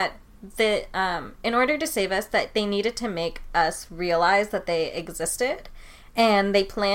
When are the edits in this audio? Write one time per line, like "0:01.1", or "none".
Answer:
none